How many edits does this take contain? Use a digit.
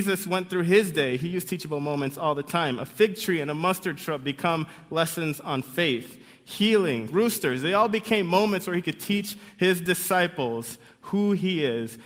1